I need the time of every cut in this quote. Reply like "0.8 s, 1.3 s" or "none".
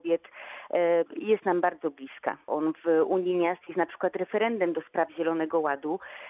1.1 s, 2.5 s